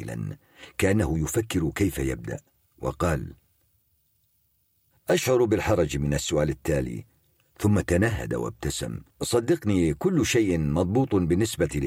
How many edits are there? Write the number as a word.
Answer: one